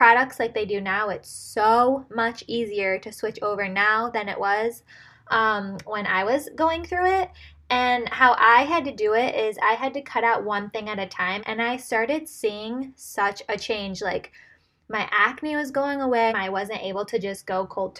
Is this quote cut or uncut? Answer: cut